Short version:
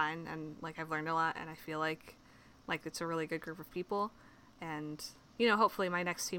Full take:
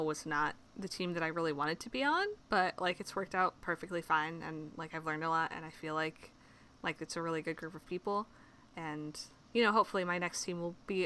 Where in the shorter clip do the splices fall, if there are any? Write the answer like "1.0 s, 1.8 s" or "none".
none